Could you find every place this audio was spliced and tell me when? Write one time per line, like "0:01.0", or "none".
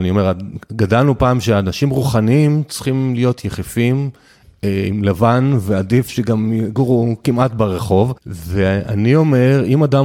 none